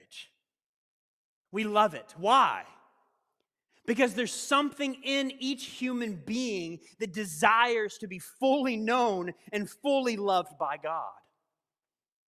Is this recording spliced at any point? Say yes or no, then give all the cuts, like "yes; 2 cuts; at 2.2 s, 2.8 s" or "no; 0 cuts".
no; 0 cuts